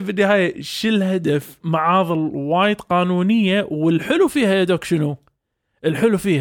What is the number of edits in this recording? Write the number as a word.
one